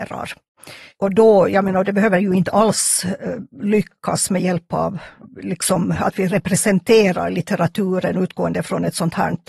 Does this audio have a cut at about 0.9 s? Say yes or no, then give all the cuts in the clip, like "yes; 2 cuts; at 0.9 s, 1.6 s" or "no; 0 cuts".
no; 0 cuts